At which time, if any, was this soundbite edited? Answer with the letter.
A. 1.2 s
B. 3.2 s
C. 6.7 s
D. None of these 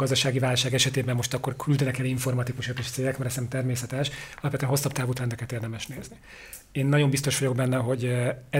D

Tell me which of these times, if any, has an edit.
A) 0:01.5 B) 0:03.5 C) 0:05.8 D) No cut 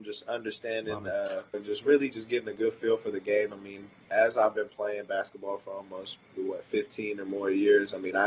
A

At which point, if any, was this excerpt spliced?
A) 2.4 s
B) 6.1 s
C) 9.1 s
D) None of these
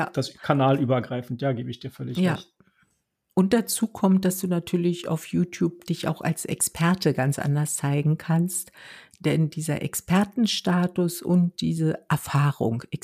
D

